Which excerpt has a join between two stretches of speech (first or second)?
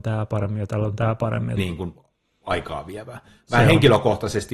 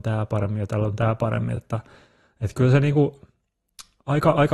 first